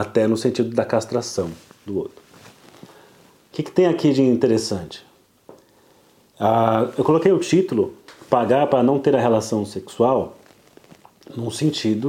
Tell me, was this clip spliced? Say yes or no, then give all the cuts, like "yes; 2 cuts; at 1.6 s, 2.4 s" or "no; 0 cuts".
no; 0 cuts